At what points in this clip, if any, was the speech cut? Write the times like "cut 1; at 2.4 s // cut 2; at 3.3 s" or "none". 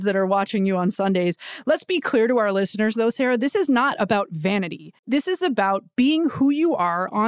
cut 1; at 5.0 s